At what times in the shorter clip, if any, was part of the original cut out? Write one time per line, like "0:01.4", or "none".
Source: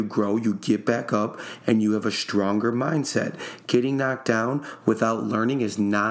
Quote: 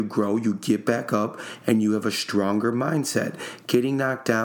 none